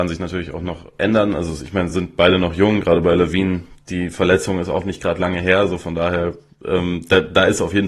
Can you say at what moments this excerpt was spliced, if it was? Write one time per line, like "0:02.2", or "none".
none